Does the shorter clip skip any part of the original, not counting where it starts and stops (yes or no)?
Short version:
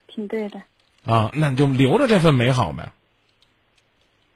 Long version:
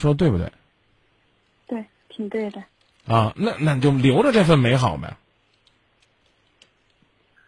yes